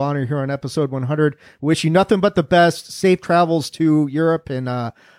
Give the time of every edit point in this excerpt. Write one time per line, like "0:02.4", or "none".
none